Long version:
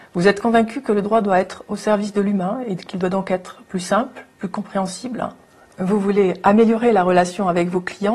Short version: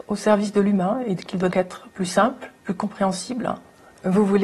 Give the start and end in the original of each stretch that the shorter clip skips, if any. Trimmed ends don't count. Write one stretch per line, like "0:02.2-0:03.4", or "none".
0:03.1-0:03.2